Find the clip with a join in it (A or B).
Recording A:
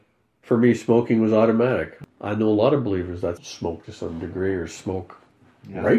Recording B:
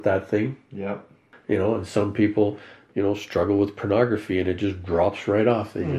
A